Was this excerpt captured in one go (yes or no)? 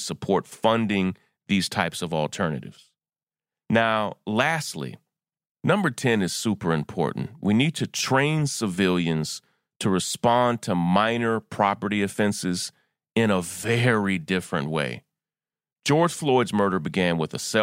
yes